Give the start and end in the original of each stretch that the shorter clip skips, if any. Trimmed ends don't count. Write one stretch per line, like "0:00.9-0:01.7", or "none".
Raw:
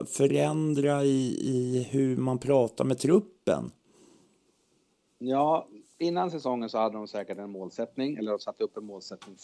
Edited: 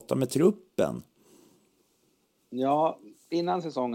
none

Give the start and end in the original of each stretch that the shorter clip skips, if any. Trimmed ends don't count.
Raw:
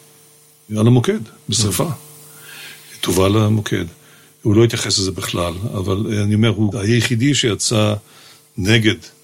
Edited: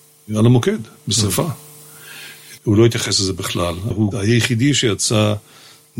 0:03.0-0:04.4
0:05.7-0:06.5

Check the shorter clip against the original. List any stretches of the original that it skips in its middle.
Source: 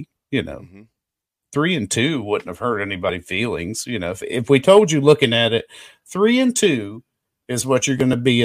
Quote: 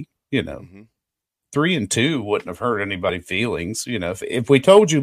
none

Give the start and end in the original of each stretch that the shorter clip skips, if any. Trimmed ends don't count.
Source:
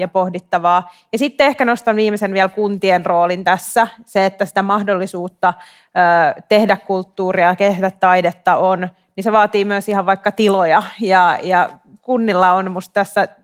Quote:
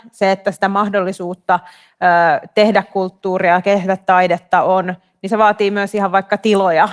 none

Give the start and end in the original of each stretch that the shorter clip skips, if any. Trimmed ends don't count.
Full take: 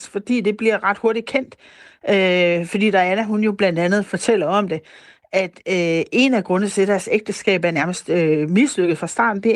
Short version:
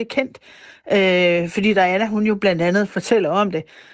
none

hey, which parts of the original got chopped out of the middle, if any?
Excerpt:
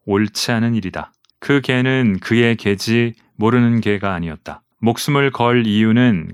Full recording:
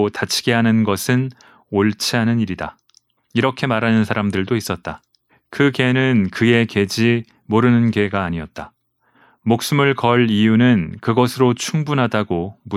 0:03.0-0:05.4
0:08.8-0:09.4

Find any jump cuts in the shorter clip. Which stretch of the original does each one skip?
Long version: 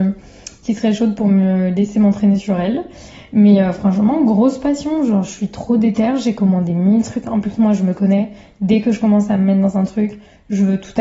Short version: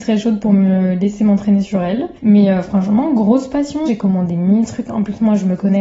0:02.9-0:03.3
0:05.0-0:06.2

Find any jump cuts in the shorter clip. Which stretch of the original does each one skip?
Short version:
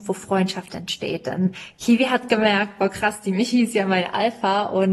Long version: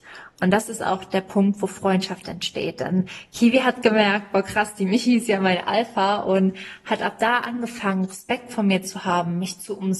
none

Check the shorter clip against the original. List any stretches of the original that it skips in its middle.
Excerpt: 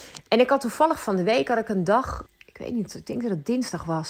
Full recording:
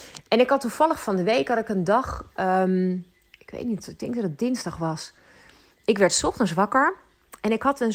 0:02.3-0:03.2

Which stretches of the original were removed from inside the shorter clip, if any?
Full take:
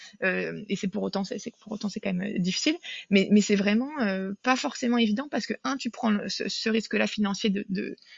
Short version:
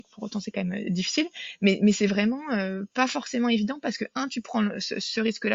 none

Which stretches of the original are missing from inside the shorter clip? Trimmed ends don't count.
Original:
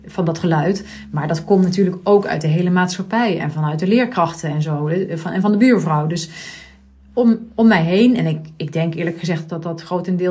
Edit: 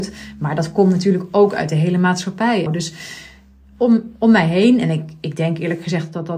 0:03.4-0:06.0

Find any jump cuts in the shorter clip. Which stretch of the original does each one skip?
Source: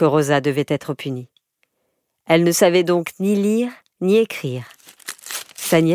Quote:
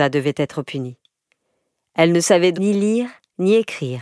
0:02.9-0:03.2

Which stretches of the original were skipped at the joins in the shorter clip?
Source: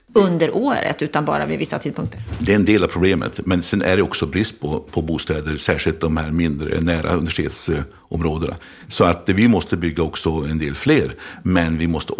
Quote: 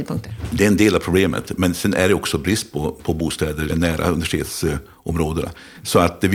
0:05.6-0:06.7

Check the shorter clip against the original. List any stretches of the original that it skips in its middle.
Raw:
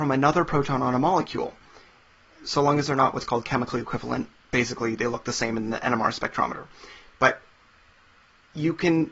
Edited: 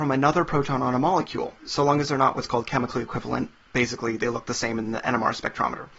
0:01.6-0:02.4

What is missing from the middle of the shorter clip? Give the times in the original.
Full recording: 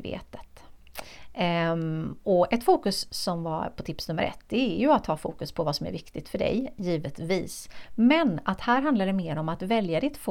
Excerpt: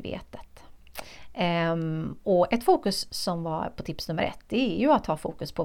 none

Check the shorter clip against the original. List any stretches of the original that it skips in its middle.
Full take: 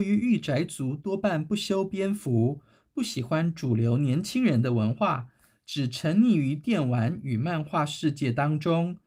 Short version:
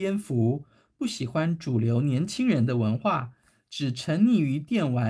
none

